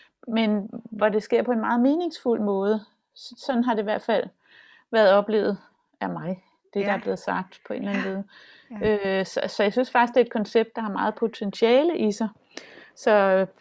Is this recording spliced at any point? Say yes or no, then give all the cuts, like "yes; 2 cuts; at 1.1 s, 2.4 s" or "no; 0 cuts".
no; 0 cuts